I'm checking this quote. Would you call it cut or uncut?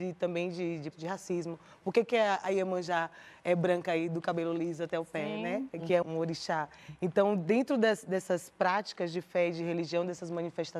cut